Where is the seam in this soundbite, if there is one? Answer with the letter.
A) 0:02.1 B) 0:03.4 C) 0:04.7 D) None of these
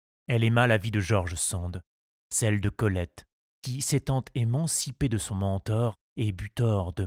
B